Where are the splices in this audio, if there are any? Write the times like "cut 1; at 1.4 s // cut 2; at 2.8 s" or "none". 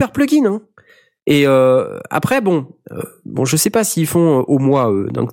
none